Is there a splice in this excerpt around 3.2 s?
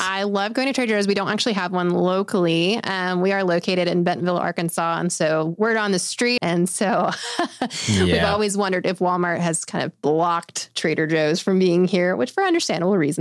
no; 1 cut; at 6.4 s

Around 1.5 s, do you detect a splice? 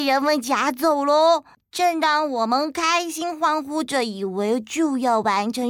yes; 1 cut; at 1.5 s

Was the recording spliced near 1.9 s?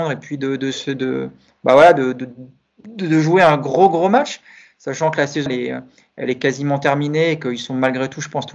no; 1 cut; at 5.5 s

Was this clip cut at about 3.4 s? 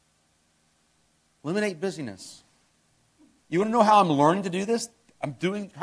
yes; 1 cut; at 3.4 s

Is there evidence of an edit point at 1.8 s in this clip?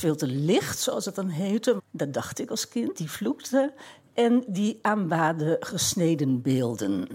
yes; 1 cut; at 1.8 s

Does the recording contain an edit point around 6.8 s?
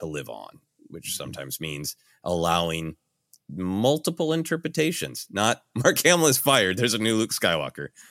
no; 0 cuts

